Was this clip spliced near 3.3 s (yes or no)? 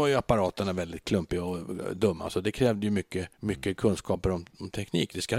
yes